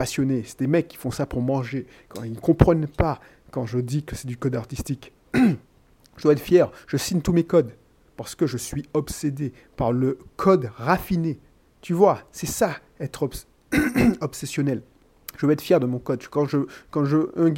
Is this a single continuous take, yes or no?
yes